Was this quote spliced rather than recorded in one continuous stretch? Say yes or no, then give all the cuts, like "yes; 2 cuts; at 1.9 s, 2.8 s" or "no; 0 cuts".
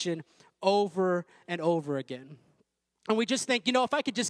no; 0 cuts